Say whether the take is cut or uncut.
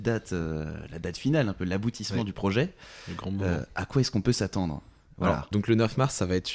uncut